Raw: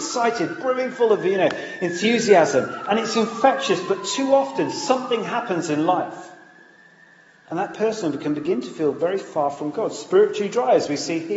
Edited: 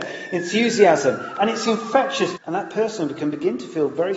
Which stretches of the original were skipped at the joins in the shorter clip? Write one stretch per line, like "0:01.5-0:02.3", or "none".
0:03.9-0:07.4